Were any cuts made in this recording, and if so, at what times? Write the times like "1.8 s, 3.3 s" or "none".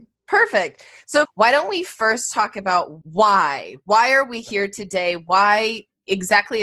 1.3 s, 3.0 s